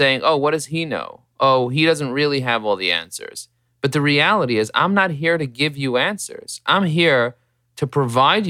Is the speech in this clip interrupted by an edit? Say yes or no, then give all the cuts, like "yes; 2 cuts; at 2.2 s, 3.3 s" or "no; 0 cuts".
no; 0 cuts